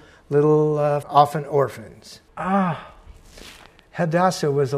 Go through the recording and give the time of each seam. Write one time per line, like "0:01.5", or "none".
0:01.0
0:02.3